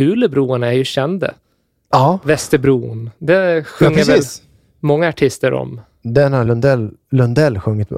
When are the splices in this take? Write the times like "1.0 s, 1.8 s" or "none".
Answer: none